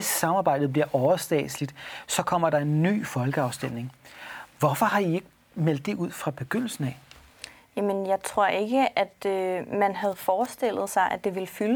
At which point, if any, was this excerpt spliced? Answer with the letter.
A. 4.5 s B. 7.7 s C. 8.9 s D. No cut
D